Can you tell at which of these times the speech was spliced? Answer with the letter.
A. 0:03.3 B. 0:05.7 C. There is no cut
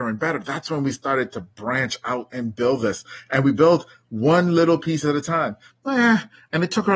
B